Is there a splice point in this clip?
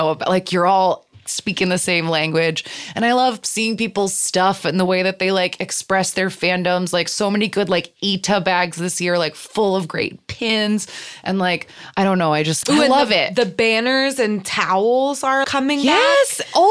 yes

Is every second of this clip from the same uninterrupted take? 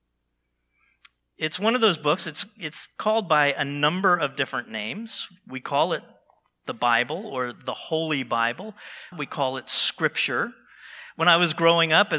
no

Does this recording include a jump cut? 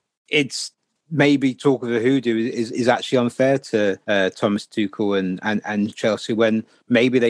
yes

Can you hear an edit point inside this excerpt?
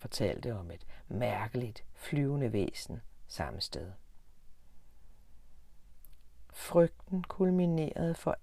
no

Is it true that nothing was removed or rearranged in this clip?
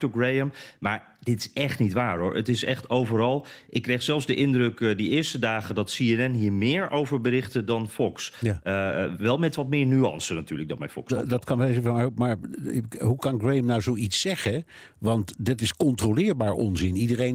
yes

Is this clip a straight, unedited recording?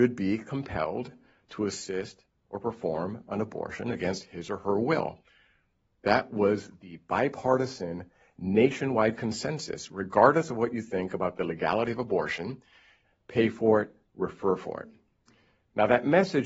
no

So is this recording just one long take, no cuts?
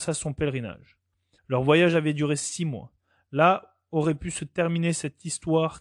no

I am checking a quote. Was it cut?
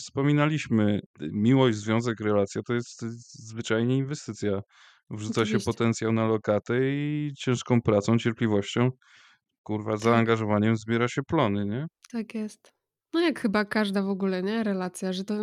no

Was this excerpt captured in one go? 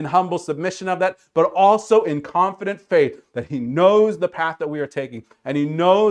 yes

